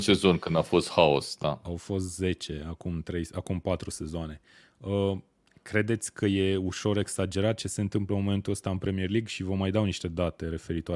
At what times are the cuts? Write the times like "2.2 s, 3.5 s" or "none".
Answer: none